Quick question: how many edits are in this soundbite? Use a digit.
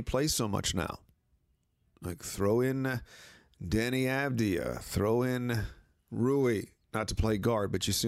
0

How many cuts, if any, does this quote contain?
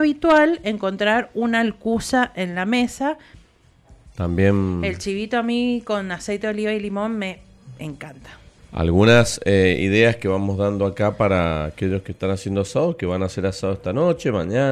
2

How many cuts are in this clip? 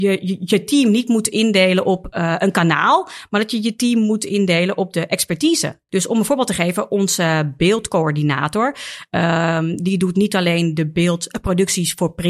1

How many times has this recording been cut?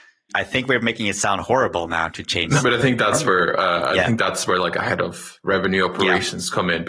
1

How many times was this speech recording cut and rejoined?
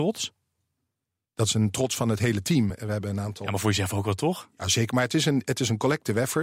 0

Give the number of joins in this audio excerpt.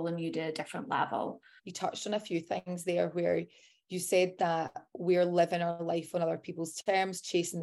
1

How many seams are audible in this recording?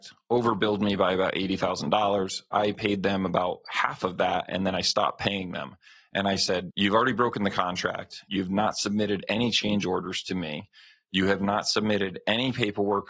2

